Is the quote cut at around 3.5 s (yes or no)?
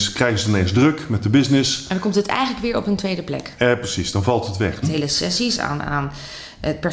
no